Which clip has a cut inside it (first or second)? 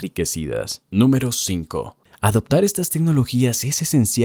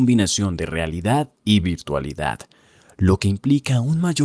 first